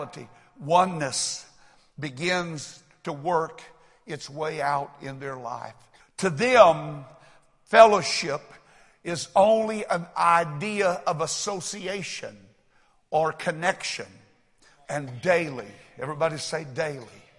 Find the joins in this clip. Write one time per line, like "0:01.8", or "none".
0:06.0
0:14.8